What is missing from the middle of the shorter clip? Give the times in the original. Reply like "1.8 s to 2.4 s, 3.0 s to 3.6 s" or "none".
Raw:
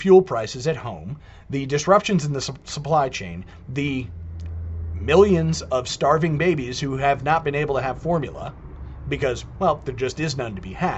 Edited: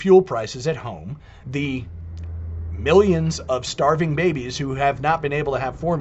1.4 s to 3.7 s